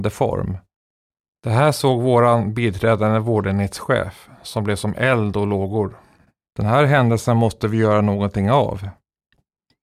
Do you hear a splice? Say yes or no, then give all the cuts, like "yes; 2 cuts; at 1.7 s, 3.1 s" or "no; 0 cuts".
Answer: yes; 1 cut; at 6.5 s